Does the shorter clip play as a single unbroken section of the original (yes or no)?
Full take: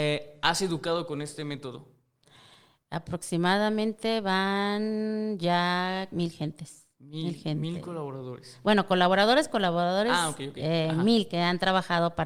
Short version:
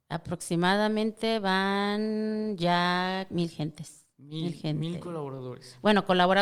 yes